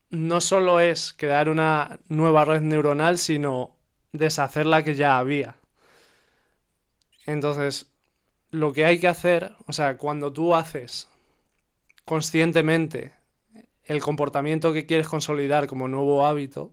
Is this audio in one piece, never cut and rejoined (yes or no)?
yes